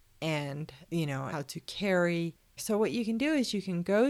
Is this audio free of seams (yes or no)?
no